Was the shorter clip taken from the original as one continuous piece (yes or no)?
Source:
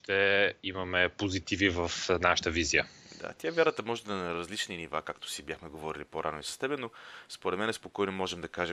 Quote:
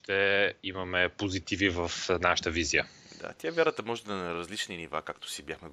yes